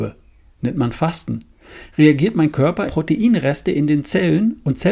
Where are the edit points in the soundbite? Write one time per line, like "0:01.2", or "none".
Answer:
0:02.9